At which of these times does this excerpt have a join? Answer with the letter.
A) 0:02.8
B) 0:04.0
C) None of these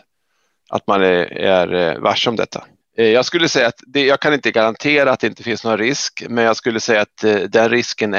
A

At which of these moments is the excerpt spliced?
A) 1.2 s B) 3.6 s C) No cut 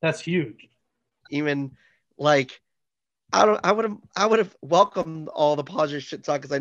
A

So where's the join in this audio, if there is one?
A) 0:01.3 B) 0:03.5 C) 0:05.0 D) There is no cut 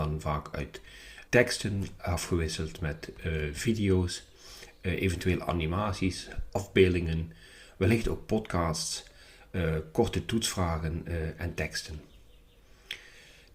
A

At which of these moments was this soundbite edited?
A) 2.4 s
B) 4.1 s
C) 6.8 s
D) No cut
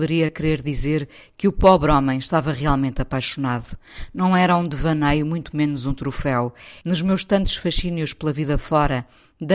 C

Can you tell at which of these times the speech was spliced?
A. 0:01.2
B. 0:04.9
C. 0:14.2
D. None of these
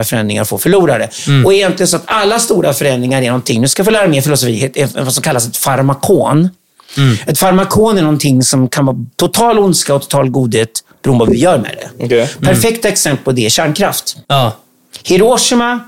C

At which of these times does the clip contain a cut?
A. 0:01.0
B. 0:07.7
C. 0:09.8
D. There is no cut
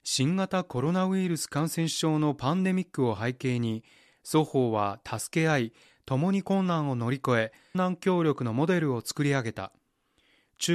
B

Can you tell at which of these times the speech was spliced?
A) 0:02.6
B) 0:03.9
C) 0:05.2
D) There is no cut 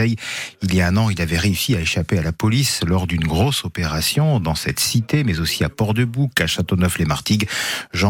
D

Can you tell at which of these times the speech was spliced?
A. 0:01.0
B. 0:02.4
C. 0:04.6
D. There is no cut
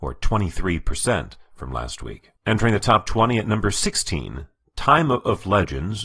B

